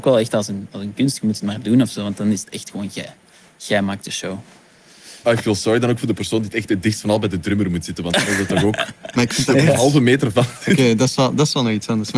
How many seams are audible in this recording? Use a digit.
1